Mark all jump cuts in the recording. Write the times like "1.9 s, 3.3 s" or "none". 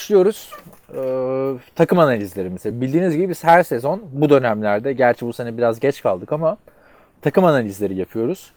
none